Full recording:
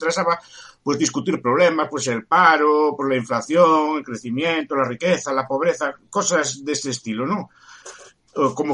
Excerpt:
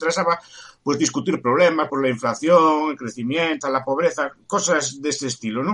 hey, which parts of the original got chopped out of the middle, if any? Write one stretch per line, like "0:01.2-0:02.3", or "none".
0:01.9-0:03.0
0:04.7-0:05.2